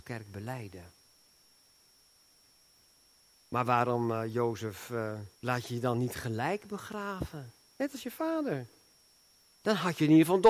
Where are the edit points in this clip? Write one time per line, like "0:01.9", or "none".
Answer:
0:05.3